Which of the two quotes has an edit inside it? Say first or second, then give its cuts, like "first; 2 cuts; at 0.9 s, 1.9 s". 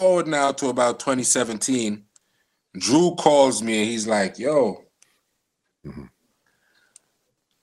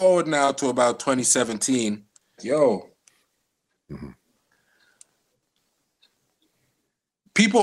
second; 1 cut; at 2.4 s